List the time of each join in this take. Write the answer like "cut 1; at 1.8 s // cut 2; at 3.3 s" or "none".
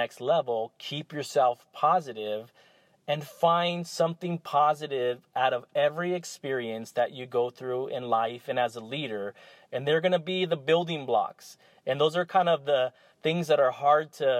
none